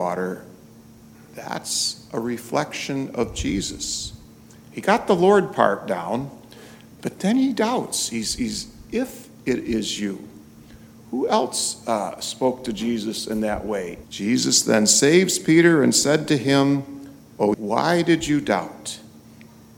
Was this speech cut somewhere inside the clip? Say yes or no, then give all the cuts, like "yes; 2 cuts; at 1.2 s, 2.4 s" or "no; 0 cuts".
yes; 3 cuts; at 4.6 s, 14.0 s, 17.5 s